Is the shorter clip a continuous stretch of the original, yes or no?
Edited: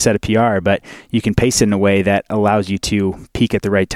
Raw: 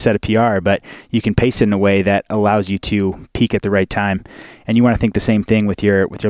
yes